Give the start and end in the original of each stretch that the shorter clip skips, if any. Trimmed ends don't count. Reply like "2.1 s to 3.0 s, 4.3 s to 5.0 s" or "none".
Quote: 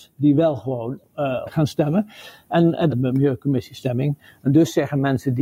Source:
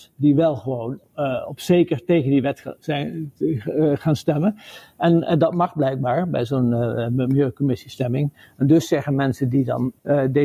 1.5 s to 3.9 s, 5.4 s to 7.0 s